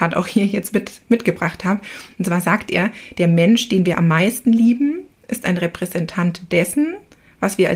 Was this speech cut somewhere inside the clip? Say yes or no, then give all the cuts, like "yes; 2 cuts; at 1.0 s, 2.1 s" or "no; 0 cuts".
no; 0 cuts